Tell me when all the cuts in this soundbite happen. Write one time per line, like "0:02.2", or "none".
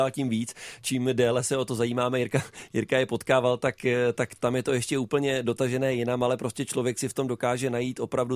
none